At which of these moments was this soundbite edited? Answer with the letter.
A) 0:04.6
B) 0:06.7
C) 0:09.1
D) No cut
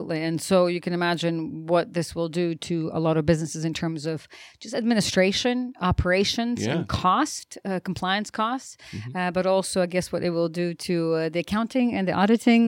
D